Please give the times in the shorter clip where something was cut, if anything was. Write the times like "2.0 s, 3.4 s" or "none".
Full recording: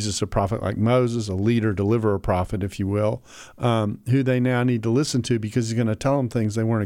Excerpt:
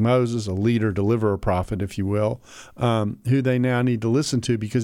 none